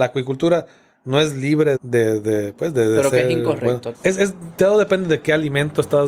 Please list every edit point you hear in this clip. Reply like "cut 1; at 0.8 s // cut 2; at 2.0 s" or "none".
cut 1; at 1.8 s // cut 2; at 3.9 s